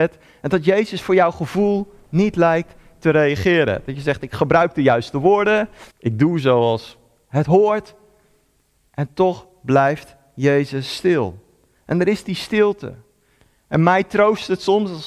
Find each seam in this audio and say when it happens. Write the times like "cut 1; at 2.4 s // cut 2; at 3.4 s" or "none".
cut 1; at 5.9 s